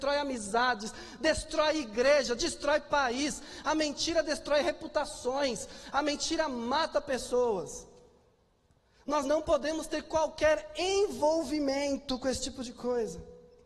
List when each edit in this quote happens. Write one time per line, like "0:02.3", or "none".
none

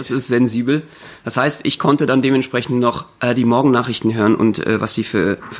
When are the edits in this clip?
none

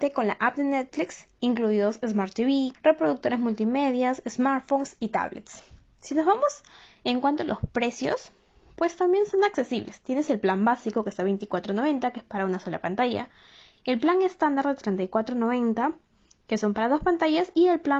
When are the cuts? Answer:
0:02.7

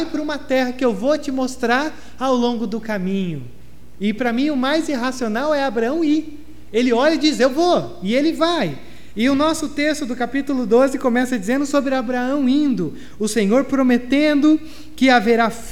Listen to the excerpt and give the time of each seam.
none

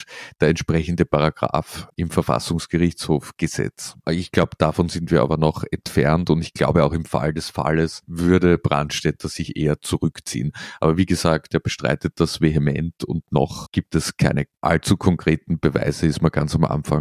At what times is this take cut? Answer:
none

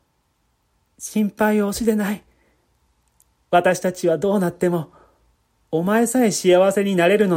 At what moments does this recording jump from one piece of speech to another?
none

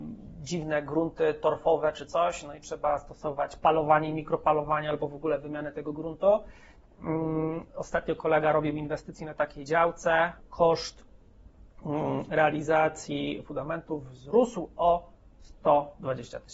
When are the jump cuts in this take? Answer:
none

